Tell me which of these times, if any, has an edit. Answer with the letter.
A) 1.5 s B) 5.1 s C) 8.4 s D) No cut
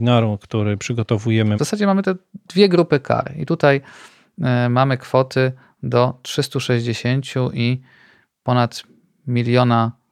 A